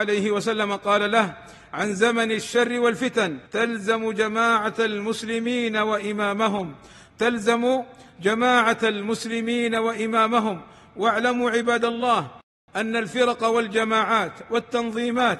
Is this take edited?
yes; 1 cut; at 3.5 s

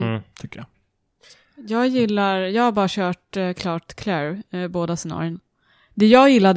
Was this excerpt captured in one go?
yes; 0 cuts

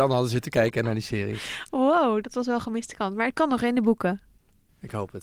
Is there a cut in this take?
no; 0 cuts

